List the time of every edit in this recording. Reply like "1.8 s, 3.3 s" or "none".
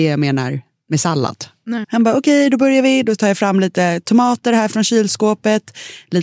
1.8 s